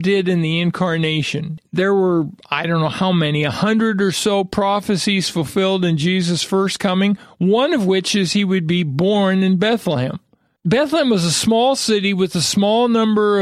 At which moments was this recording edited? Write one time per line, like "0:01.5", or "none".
none